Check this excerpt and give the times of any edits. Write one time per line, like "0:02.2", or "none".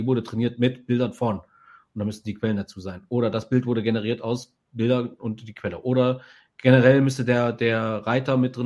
none